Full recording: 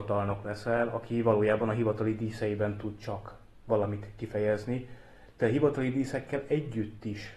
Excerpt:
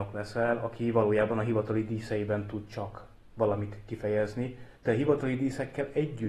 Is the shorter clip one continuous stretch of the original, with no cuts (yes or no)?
no